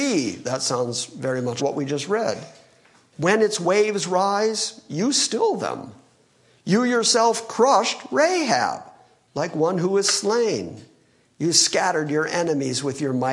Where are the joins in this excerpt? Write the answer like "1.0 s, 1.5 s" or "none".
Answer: 1.6 s